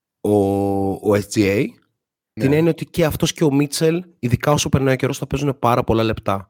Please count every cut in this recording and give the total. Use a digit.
1